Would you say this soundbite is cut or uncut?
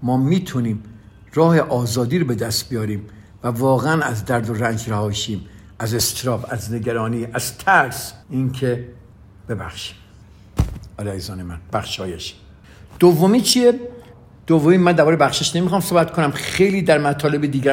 cut